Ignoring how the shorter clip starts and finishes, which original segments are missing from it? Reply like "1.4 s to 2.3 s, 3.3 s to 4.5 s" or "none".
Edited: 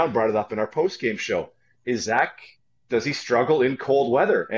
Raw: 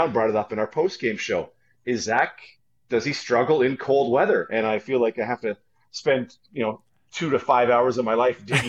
none